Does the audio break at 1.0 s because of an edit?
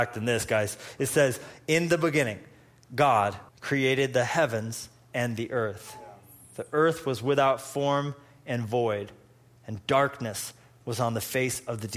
no; 1 cut; at 3.5 s

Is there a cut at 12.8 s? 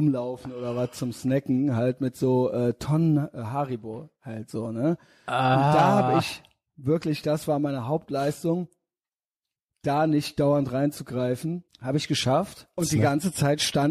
yes; 2 cuts; at 11.7 s, 12.8 s

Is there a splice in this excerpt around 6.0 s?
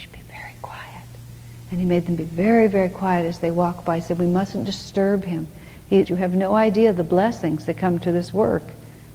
yes; 1 cut; at 6.0 s

